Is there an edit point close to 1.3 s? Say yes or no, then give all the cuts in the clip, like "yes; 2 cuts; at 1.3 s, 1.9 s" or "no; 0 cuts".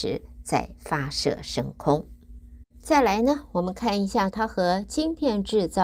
no; 2 cuts; at 2.7 s, 4.3 s